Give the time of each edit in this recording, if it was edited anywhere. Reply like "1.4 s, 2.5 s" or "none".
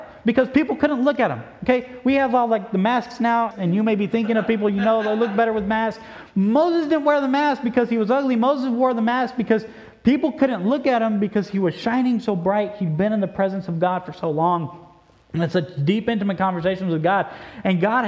3.5 s